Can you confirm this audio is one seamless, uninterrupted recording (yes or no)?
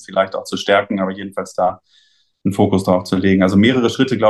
yes